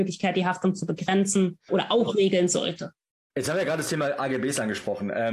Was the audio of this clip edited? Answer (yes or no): yes